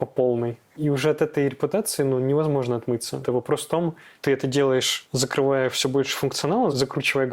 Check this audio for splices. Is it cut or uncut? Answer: cut